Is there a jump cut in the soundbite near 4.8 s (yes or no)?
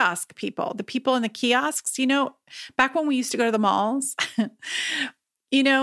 no